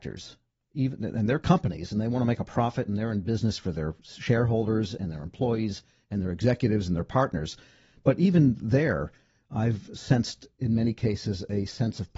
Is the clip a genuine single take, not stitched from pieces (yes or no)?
yes